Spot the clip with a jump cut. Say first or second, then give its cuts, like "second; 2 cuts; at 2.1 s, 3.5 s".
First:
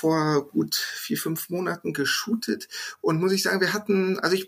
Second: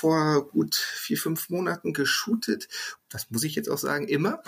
second; 1 cut; at 3.0 s